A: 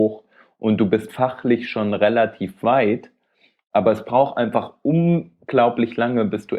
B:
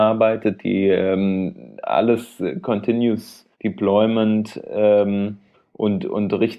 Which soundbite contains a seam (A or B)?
B